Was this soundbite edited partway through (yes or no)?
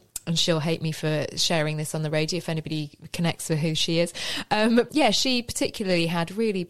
yes